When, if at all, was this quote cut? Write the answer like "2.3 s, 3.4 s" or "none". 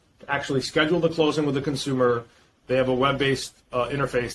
2.6 s